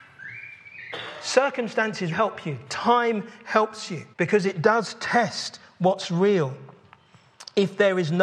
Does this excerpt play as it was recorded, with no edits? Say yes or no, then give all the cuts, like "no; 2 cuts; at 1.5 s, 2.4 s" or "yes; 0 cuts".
no; 2 cuts; at 2.1 s, 4.1 s